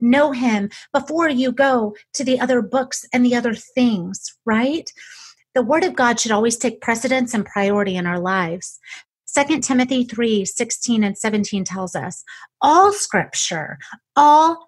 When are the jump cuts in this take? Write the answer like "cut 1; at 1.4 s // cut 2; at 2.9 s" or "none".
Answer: none